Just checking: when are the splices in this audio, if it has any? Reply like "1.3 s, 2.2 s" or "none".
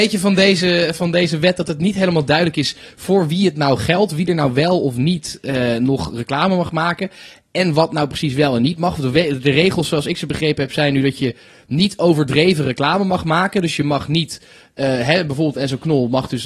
none